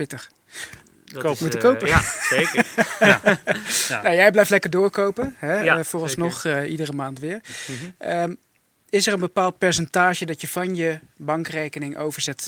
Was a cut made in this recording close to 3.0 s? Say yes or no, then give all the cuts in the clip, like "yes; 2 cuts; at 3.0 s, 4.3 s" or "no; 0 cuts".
no; 0 cuts